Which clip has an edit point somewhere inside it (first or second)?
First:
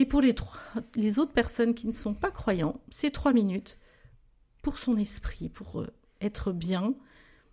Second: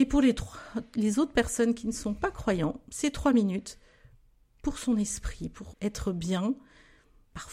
second